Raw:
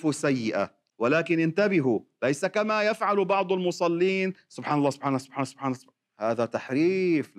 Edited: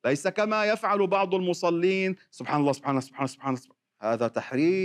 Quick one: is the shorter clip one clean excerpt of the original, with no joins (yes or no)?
yes